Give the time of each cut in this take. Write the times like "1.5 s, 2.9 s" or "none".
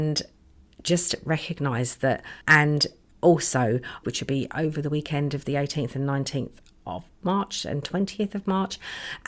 2.4 s, 4.0 s